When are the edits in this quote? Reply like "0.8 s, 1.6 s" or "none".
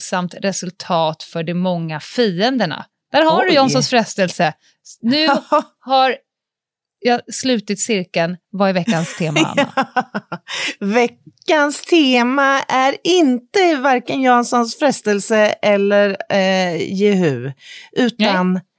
none